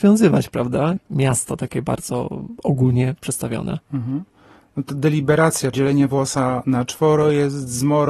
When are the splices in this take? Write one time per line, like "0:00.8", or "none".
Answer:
0:01.0
0:05.7